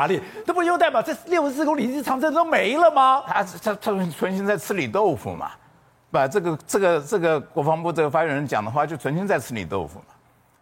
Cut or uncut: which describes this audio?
uncut